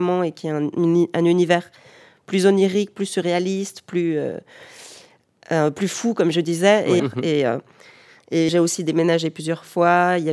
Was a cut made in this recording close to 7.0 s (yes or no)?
yes